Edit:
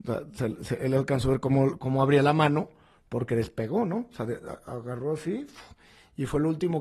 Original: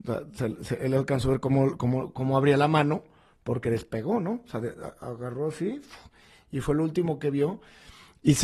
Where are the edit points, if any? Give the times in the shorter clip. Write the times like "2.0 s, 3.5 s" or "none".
1.8 s